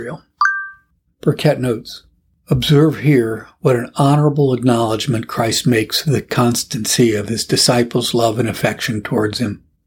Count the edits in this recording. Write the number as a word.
zero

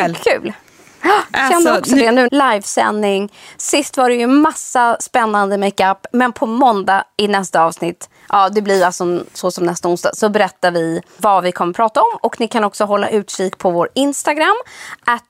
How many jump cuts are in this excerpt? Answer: one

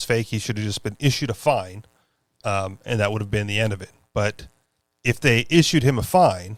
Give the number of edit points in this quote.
zero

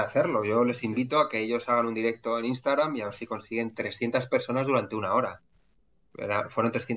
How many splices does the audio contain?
zero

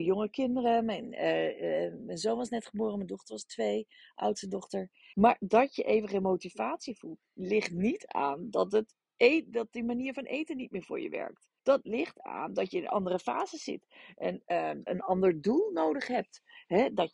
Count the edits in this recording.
three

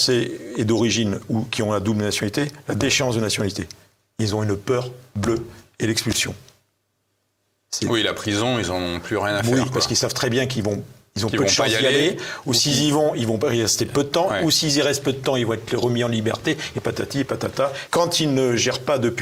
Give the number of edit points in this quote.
one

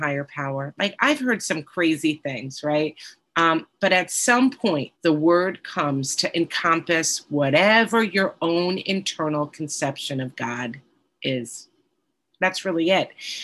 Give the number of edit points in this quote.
two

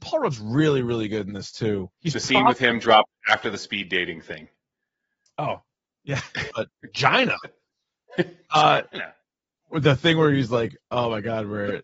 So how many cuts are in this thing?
two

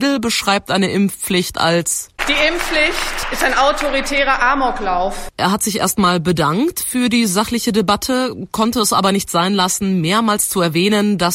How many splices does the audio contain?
one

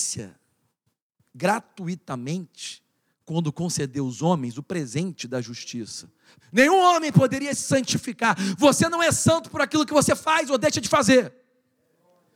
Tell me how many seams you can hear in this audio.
one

